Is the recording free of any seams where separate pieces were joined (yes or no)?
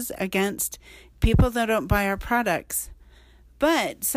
yes